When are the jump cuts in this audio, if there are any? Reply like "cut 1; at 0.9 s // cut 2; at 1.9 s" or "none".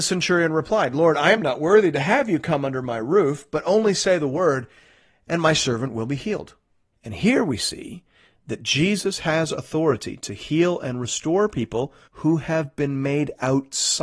cut 1; at 6.9 s // cut 2; at 12.0 s